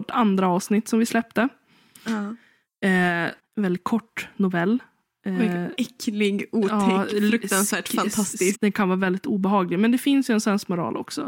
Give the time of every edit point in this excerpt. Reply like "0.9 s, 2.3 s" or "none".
3.4 s, 8.5 s

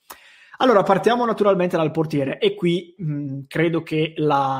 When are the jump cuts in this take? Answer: none

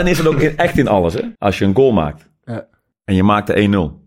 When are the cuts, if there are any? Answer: 1.4 s

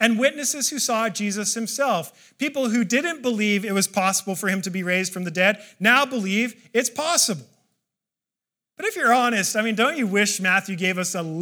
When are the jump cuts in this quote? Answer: none

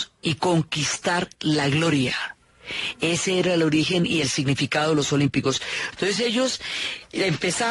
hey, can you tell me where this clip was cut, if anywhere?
5.9 s

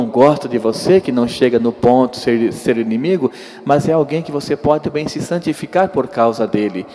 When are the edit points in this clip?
4.8 s

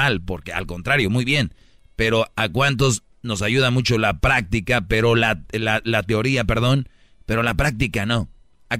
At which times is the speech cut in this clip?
none

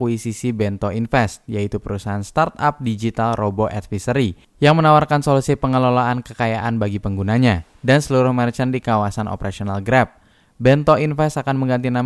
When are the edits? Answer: 7.7 s

